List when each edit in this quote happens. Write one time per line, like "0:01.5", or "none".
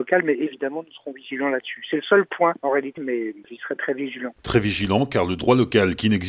0:03.0